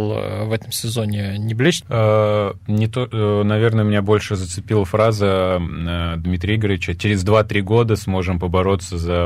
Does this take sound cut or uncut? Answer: cut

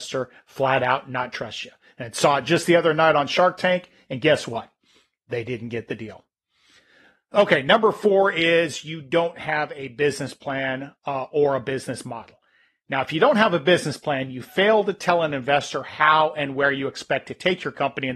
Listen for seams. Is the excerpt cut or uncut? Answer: uncut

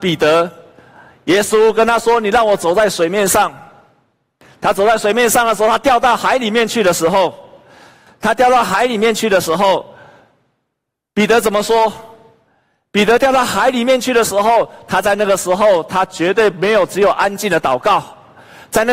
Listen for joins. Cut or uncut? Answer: uncut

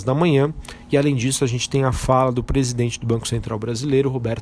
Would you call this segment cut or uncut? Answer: uncut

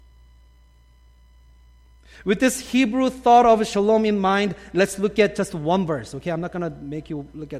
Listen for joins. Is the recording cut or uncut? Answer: uncut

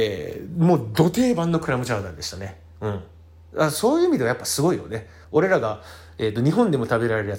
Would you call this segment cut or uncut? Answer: cut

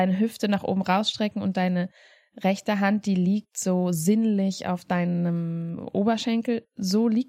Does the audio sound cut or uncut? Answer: uncut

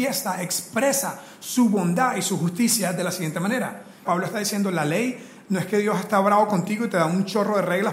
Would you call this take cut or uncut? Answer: cut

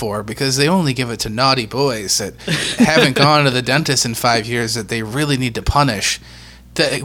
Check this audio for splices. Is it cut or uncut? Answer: uncut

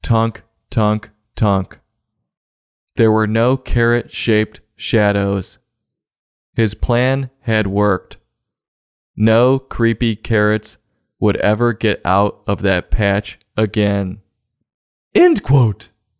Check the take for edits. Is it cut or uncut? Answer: uncut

